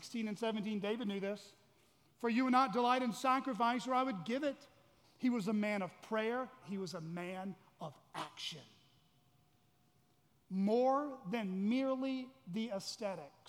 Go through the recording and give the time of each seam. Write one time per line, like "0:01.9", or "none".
0:05.0
0:06.6
0:10.3